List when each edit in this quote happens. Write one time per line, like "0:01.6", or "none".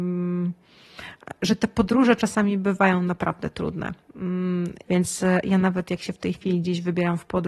0:04.8